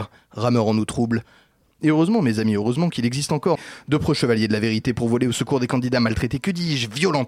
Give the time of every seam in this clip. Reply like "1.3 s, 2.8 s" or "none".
1.7 s, 3.6 s